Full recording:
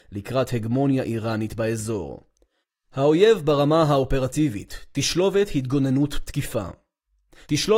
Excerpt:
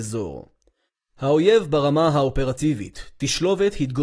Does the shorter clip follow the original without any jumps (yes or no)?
yes